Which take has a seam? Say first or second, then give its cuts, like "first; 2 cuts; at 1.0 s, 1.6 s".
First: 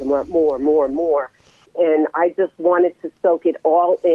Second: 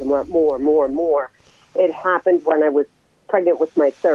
first; 1 cut; at 1.7 s